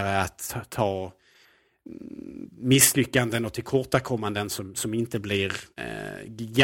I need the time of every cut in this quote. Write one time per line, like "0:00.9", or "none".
0:05.7